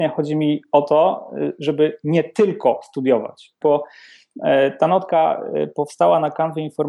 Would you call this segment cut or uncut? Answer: cut